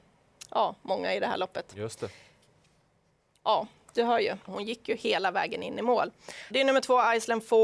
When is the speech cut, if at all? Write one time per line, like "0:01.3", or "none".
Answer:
0:04.5
0:06.5